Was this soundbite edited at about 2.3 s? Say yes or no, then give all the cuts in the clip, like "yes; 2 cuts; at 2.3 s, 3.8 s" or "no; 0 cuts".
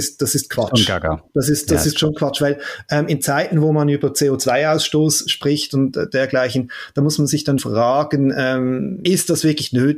no; 2 cuts; at 7.6 s, 9.1 s